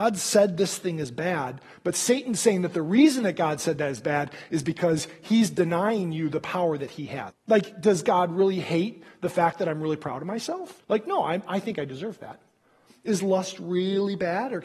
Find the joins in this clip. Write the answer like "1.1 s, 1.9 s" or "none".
7.3 s, 10.8 s